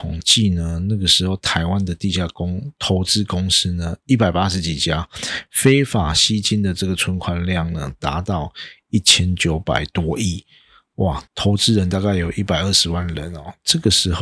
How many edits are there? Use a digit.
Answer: 1